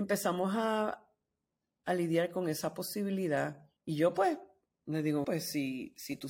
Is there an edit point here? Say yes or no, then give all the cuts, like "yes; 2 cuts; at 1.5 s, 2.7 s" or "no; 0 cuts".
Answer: yes; 2 cuts; at 3.8 s, 5.2 s